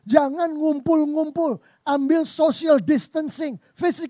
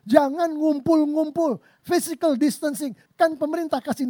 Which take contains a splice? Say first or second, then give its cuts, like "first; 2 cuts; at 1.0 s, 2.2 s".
second; 2 cuts; at 1.8 s, 3.1 s